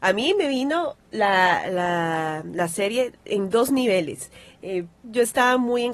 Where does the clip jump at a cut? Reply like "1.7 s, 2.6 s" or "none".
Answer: 5.0 s